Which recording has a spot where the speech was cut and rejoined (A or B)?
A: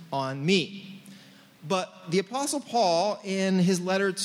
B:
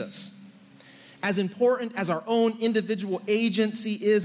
A